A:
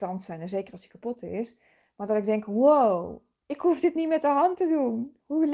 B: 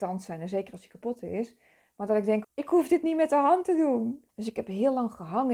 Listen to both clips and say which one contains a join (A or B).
B